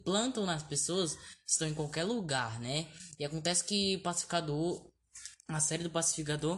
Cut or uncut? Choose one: uncut